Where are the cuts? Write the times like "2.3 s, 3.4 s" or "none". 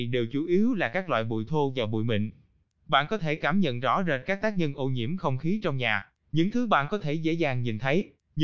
2.7 s